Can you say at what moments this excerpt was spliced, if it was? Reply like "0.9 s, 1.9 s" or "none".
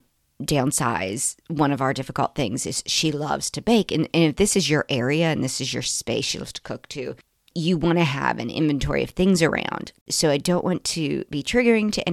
10.0 s